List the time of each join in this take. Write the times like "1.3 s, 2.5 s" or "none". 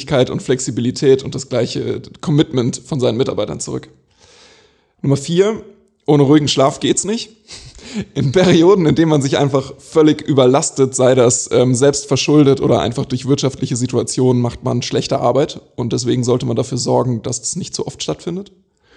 none

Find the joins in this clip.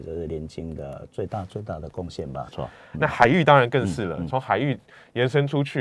2.5 s

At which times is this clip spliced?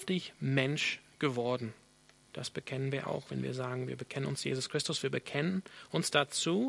2.2 s

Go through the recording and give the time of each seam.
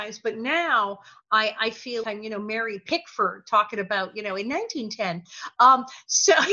2.0 s

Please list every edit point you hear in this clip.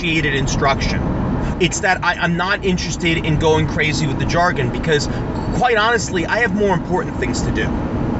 1.5 s

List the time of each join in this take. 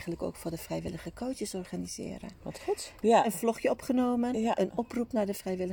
3.0 s

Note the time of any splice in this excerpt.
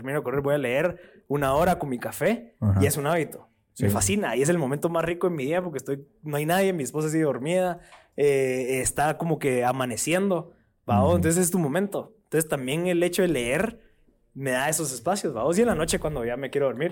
none

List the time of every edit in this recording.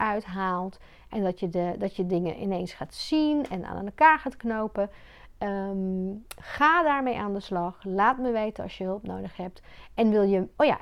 none

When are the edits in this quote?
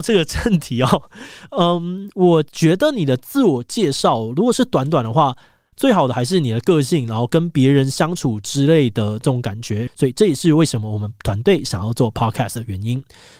5.7 s, 9.9 s

